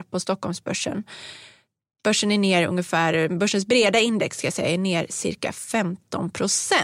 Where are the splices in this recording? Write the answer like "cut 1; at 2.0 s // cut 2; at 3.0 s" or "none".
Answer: none